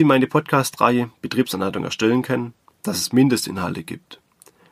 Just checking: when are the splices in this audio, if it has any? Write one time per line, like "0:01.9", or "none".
0:02.7